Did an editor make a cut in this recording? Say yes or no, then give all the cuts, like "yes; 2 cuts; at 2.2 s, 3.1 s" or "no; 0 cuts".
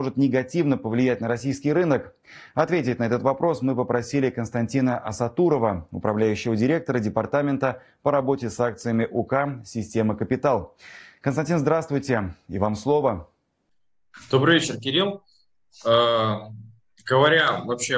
no; 0 cuts